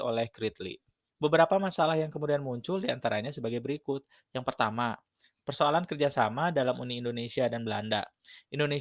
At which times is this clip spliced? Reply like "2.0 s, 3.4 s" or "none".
1.1 s